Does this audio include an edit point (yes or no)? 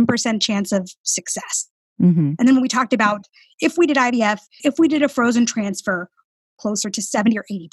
yes